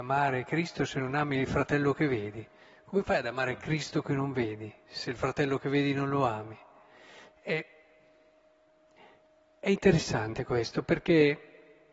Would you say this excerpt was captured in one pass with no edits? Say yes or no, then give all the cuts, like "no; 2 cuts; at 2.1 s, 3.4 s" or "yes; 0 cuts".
yes; 0 cuts